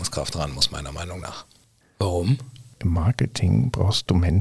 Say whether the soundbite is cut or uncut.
cut